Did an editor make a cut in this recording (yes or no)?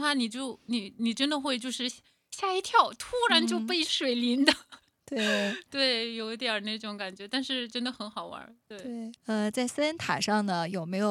yes